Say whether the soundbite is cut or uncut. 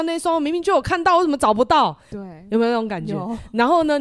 cut